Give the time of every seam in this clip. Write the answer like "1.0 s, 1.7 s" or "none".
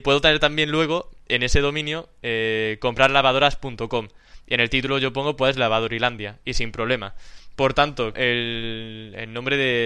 8.1 s